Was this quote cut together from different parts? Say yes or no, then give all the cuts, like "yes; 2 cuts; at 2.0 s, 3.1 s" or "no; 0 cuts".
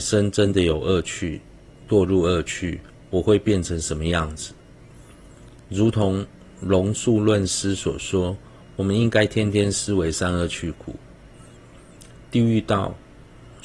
no; 0 cuts